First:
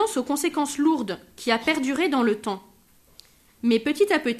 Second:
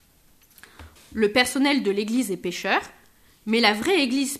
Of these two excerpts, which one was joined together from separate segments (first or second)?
second